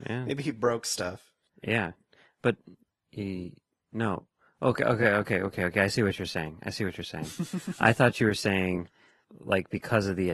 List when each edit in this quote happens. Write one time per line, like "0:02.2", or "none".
none